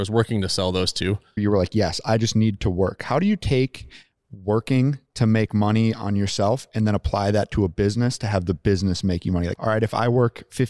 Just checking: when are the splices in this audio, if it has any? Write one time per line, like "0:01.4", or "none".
0:01.4
0:09.6

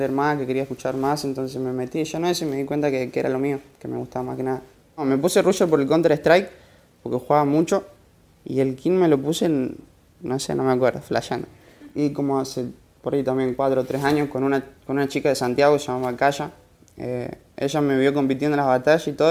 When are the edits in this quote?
none

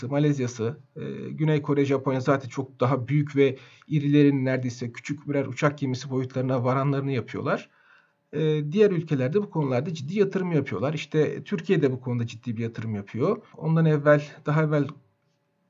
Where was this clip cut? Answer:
0:13.5

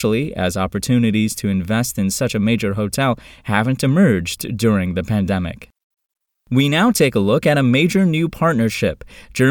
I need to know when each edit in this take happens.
none

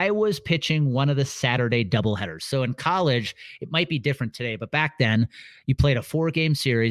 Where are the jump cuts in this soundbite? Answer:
none

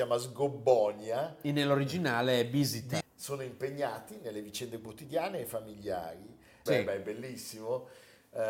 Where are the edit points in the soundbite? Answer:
0:03.0
0:06.7

